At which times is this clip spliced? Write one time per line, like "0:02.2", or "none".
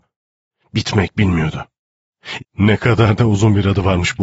0:02.4

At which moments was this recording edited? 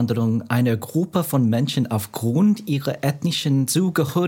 none

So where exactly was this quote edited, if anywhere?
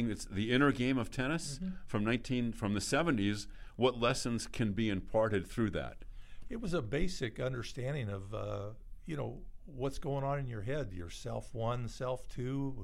none

